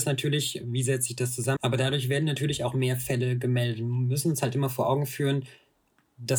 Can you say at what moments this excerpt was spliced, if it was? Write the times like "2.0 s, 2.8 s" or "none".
1.6 s